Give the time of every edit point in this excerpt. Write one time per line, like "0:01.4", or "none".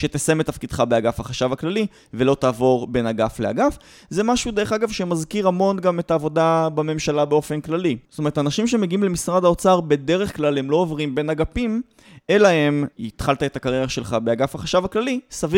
0:08.0
0:12.9